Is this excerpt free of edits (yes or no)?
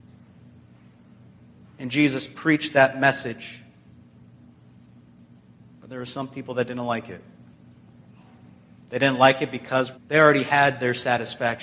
no